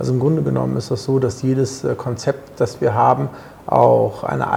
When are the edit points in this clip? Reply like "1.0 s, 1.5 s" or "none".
none